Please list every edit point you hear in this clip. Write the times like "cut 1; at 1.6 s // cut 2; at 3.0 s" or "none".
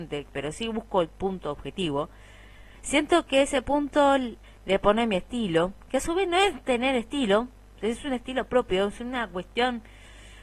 cut 1; at 2.7 s // cut 2; at 4.4 s